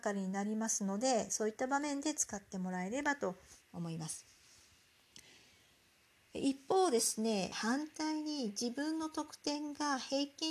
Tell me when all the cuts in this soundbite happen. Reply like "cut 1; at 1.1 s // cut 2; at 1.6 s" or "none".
cut 1; at 7.5 s